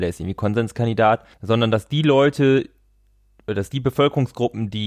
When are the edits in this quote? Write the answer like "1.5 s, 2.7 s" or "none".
1.3 s